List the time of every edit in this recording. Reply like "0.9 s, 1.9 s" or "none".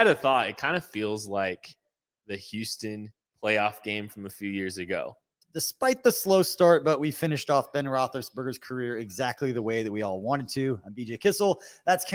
5.4 s